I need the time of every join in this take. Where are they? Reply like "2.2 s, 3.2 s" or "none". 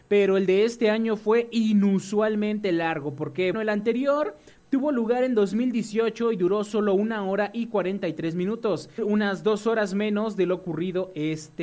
3.5 s, 9.0 s